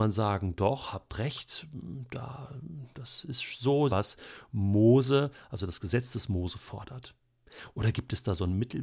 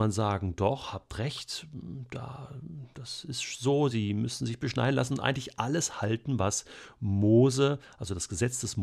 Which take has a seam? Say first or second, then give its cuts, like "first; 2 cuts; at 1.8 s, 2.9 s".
first; 1 cut; at 3.9 s